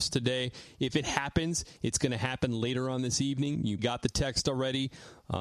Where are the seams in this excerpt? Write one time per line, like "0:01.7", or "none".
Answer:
0:03.8